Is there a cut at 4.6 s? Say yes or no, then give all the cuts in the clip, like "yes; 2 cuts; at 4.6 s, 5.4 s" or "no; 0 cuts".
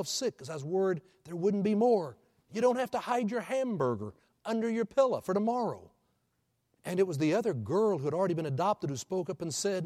no; 2 cuts; at 2.4 s, 6.7 s